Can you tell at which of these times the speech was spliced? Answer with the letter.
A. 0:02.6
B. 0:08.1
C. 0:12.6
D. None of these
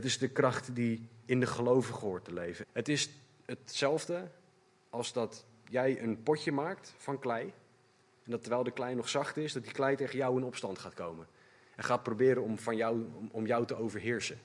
A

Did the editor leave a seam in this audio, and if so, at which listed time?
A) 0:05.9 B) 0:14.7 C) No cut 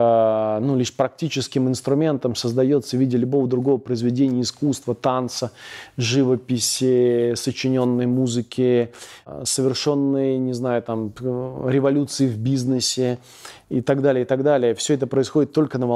C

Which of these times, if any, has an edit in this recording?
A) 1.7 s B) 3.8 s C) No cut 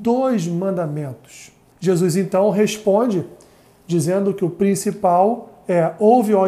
A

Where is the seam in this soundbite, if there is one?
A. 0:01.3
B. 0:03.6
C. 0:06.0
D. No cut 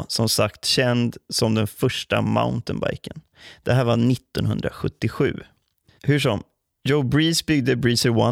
C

